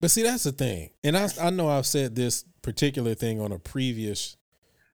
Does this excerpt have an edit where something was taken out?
no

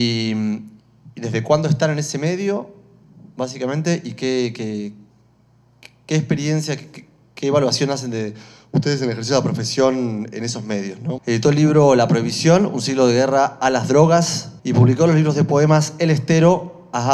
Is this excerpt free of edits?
no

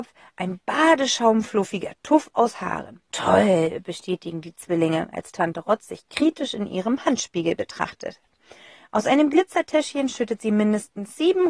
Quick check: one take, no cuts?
no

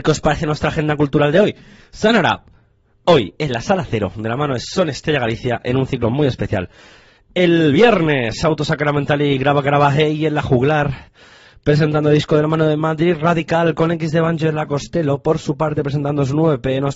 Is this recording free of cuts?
yes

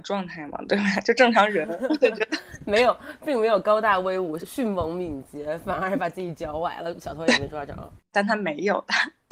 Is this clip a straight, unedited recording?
no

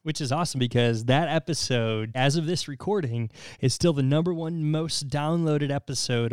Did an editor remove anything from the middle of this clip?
yes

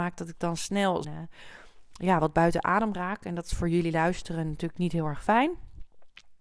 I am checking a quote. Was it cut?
yes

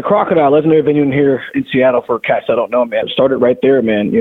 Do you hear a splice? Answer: yes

